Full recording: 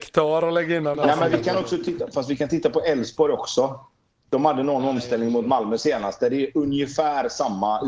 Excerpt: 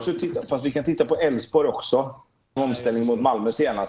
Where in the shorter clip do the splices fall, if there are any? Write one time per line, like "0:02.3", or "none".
0:02.6

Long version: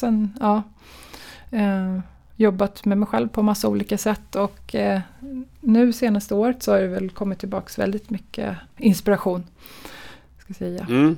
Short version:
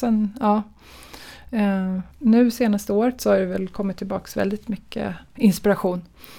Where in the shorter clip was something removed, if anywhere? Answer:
0:02.1

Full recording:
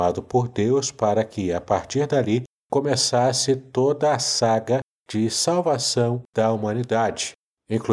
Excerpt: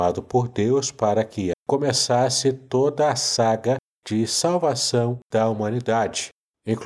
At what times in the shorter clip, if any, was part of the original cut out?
0:01.5

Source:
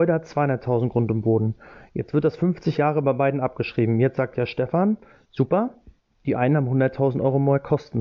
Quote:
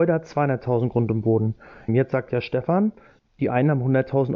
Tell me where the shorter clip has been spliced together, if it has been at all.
0:01.9
0:03.2

